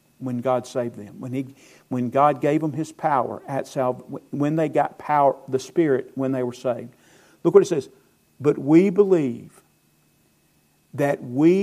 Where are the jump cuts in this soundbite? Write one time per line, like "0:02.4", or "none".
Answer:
none